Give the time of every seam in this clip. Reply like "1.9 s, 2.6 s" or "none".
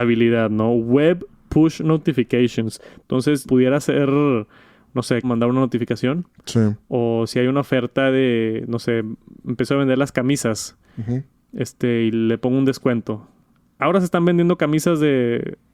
3.5 s, 5.2 s